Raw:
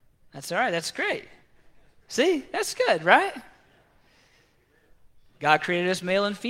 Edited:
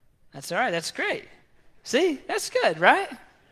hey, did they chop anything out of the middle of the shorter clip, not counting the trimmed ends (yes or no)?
yes